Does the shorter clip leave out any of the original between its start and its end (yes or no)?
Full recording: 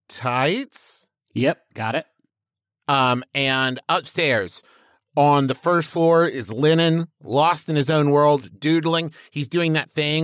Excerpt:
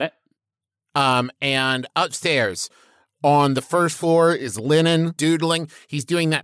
yes